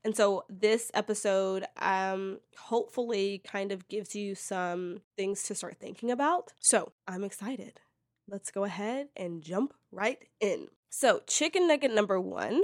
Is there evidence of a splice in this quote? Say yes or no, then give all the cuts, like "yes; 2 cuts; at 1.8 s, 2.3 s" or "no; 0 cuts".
yes; 1 cut; at 6.6 s